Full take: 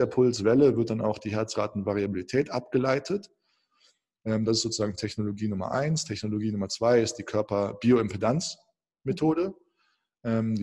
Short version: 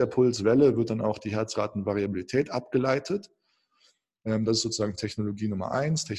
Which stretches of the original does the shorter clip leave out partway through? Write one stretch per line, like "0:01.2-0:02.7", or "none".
none